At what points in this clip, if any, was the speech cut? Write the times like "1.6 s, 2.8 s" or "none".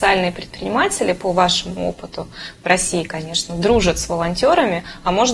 none